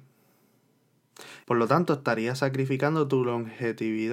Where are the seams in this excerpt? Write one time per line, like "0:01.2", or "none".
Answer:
0:01.4

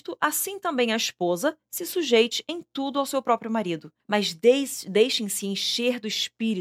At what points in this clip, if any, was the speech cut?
0:04.1

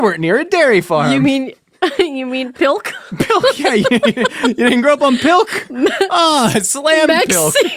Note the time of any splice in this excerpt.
none

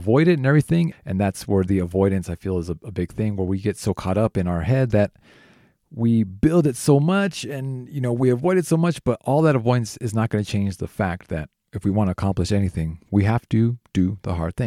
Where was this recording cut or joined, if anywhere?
0:00.9

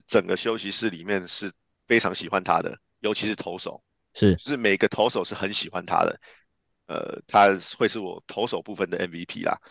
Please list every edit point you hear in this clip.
0:06.7

